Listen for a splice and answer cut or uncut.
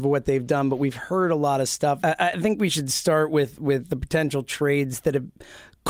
cut